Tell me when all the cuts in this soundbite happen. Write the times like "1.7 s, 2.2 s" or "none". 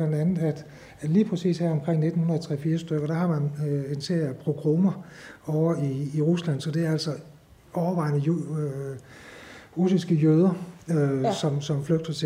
none